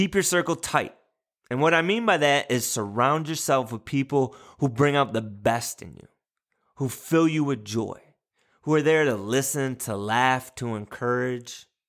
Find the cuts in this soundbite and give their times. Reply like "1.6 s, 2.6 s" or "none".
none